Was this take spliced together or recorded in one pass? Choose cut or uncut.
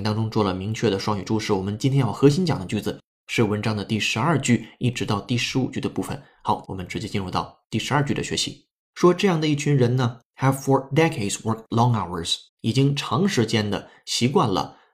cut